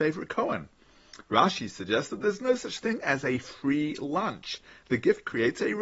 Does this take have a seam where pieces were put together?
no; 0 cuts

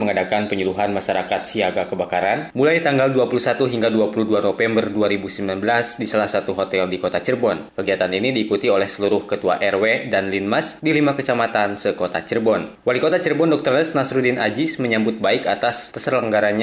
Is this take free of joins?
yes; 0 cuts

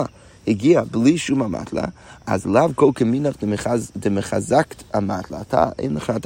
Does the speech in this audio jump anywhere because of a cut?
no; 0 cuts

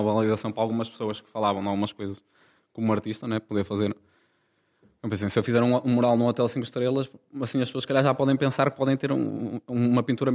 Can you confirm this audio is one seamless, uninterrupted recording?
yes; 0 cuts

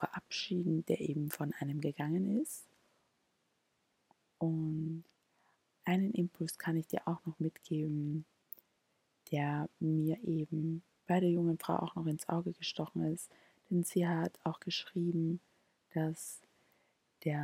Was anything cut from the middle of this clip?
yes; 1 cut; at 4.2 s

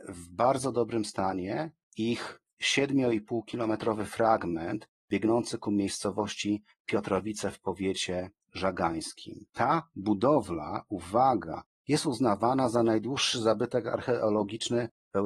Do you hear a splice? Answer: yes; 1 cut; at 9.5 s

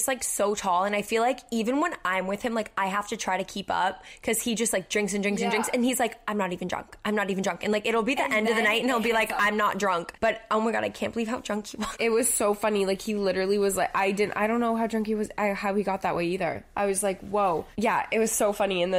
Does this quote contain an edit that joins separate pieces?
no; 0 cuts

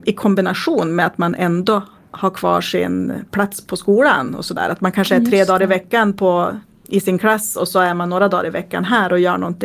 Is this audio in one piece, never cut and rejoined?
yes; 0 cuts

